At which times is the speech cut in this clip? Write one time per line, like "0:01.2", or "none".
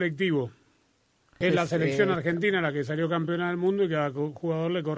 0:01.4